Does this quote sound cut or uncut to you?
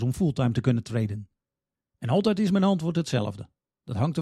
uncut